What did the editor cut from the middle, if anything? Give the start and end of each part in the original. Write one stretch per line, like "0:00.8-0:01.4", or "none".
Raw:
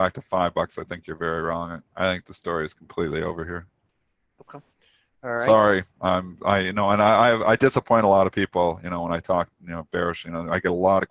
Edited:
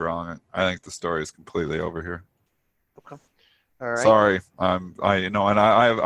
none